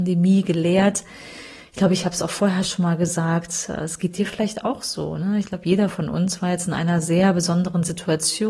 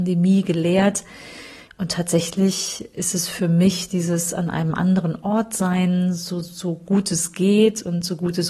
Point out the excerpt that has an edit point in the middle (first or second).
second